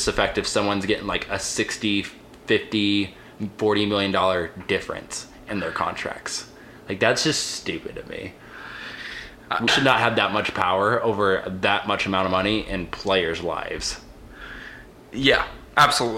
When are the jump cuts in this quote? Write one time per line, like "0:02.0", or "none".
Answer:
0:09.7